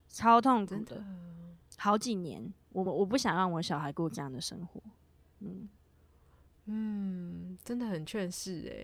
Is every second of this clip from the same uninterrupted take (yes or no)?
yes